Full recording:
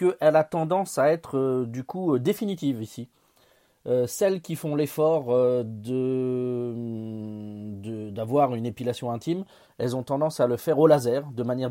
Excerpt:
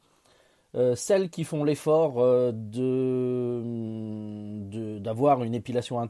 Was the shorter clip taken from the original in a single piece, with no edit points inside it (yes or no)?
yes